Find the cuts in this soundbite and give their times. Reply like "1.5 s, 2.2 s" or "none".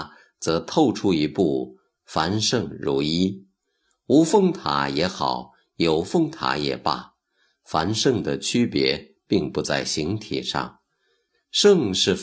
none